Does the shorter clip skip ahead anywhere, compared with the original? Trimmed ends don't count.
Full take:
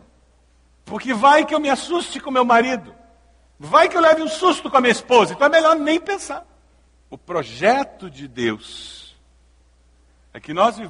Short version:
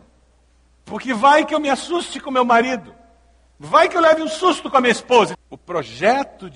yes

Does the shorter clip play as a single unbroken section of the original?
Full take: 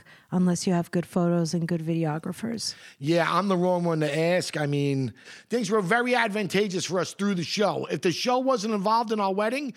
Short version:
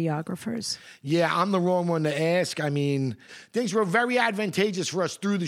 yes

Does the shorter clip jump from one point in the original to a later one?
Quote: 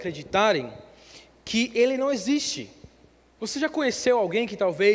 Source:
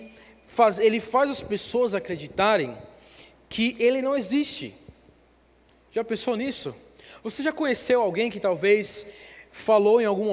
yes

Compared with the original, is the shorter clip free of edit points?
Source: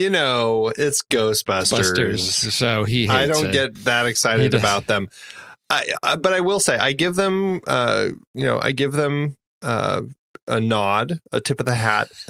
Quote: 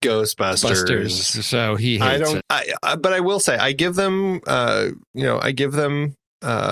no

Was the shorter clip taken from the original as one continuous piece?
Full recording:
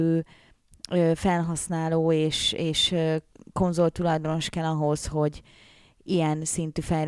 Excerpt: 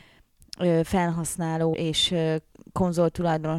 no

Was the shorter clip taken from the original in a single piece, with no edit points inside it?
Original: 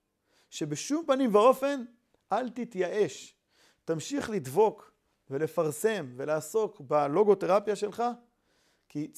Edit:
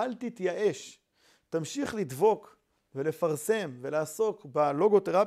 yes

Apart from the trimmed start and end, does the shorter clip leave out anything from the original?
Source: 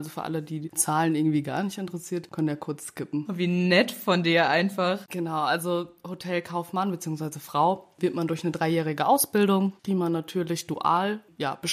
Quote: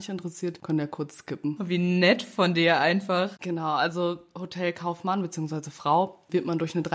no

